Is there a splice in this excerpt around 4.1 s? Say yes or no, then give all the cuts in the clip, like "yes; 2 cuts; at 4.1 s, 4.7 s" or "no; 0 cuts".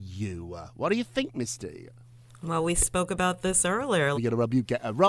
yes; 1 cut; at 4.1 s